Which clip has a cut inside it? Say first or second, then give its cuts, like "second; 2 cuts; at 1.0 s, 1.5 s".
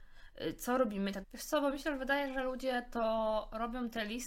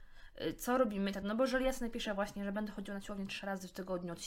first; 1 cut; at 1.2 s